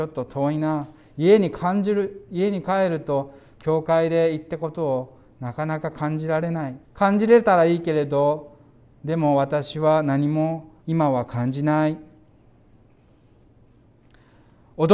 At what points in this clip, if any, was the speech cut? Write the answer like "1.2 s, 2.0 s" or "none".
6.8 s, 10.8 s